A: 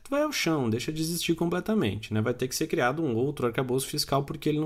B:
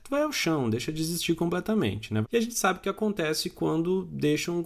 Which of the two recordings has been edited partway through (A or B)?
B